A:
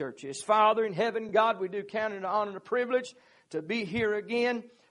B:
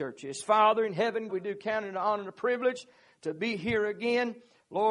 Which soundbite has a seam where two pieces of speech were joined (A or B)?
B